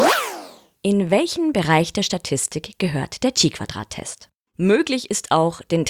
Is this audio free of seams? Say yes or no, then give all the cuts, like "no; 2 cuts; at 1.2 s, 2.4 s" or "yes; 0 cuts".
no; 1 cut; at 4.5 s